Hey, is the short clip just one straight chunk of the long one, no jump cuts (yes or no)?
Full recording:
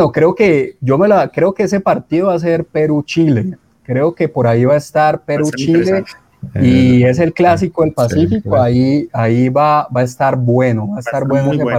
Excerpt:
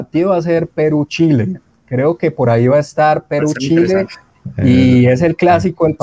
yes